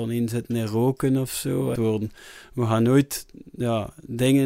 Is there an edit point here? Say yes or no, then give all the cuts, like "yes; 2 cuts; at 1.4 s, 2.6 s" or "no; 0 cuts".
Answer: yes; 1 cut; at 1.7 s